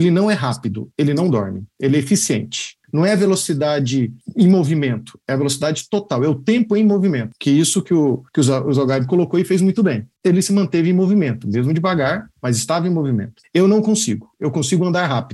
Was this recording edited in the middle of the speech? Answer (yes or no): no